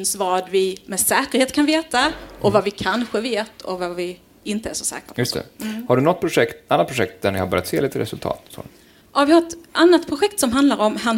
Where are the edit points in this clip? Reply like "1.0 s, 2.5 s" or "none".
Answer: none